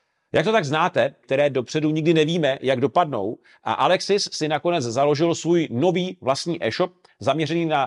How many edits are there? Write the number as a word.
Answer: one